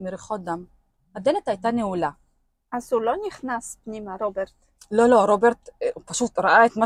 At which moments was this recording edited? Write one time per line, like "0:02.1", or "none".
none